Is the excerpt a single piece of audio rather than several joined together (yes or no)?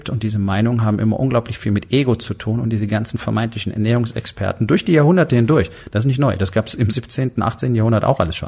yes